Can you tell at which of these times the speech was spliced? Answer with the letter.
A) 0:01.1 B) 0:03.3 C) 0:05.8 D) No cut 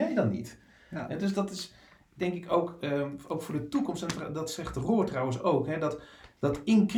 D